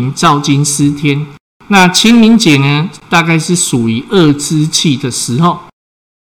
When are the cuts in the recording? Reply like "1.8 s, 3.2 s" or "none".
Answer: 1.5 s